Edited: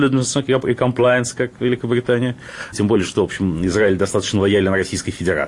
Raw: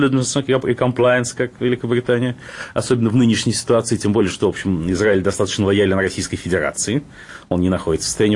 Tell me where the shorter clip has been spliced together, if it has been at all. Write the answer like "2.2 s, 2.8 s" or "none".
2.7 s